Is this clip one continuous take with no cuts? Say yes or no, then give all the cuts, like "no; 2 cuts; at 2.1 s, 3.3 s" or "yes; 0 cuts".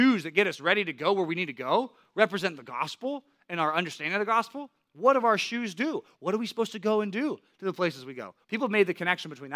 no; 2 cuts; at 6.1 s, 8.4 s